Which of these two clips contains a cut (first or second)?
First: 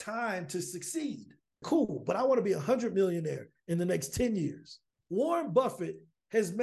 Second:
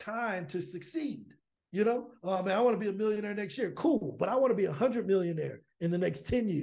first